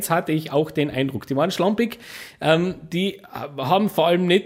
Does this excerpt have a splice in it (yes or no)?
no